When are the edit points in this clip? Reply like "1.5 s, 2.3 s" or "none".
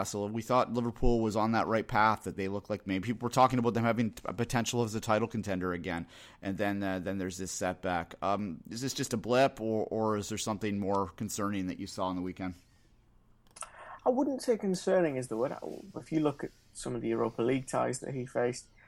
2.3 s, 15.9 s